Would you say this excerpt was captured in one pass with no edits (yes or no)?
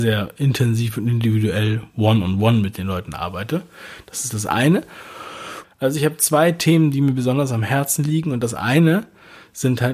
no